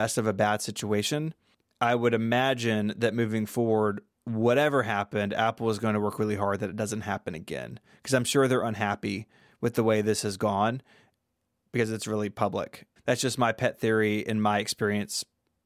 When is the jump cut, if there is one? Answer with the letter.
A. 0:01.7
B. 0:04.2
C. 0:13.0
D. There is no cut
C